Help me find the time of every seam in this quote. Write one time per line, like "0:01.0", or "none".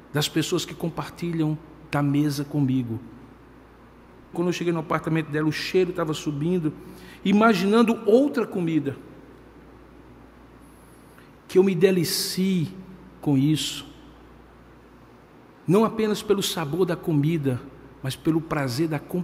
0:04.3